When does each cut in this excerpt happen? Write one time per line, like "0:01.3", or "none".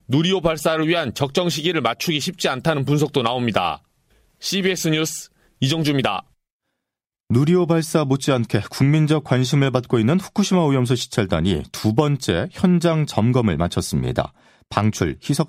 none